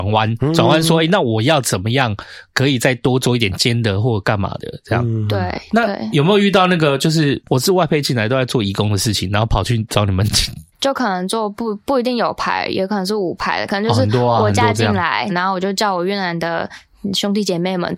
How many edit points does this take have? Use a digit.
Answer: 2